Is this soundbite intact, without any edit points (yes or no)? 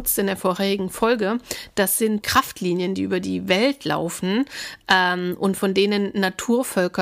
no